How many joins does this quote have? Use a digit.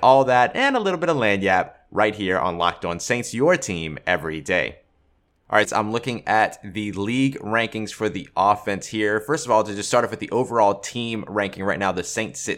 1